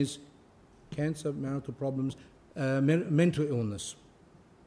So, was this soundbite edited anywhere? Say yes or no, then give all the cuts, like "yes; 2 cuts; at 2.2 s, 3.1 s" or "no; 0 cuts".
no; 0 cuts